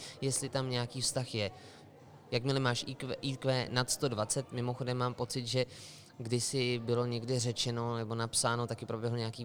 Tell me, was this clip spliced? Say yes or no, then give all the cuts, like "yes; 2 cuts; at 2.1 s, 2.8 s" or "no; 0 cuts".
no; 0 cuts